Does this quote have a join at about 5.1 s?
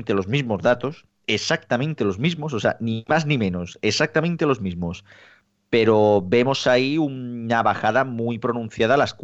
no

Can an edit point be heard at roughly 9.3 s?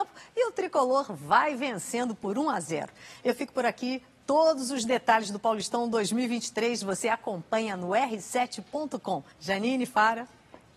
yes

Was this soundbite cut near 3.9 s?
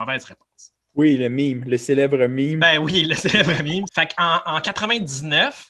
yes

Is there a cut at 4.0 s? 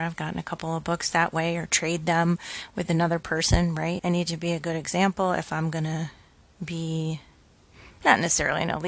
yes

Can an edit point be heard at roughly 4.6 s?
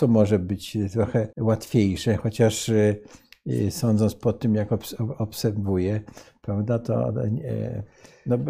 no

